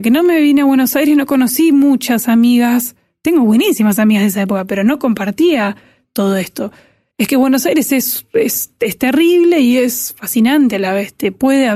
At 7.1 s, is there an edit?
yes; 1 cut; at 7.1 s

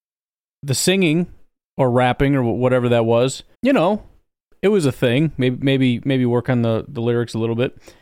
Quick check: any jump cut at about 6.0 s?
no; 1 cut; at 3.5 s

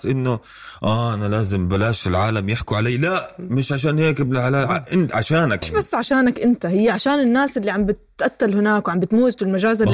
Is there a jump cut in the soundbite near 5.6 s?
yes; 1 cut; at 5.6 s

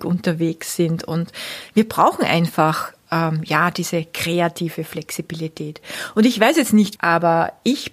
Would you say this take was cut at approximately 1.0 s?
no; 1 cut; at 7.0 s

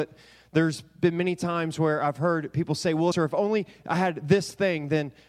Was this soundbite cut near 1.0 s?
no; 1 cut; at 3.1 s

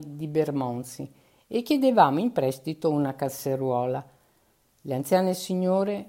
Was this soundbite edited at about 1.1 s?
no; 0 cuts

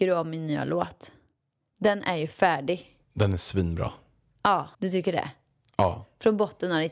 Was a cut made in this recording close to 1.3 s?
no; 2 cuts; at 3.0 s, 4.7 s

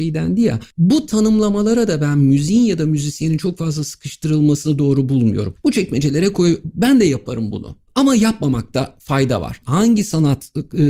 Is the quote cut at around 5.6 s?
yes; 3 cuts; at 5.6 s, 7.9 s, 9.6 s

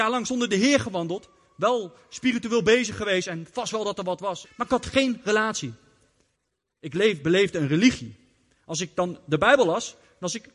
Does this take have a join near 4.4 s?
yes; 1 cut; at 4.4 s

